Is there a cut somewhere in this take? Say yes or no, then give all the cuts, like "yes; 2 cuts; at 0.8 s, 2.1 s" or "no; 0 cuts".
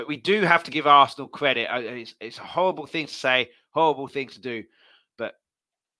no; 0 cuts